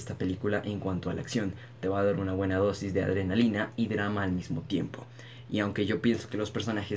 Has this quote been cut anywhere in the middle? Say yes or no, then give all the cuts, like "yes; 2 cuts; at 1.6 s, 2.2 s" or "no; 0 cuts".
no; 0 cuts